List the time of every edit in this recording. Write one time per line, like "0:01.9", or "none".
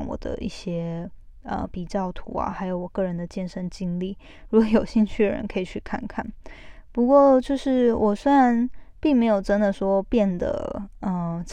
none